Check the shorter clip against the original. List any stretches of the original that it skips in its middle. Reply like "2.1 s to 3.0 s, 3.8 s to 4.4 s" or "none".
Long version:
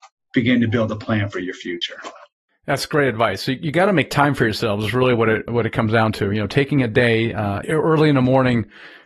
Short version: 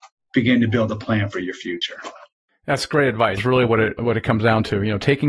3.4 s to 4.9 s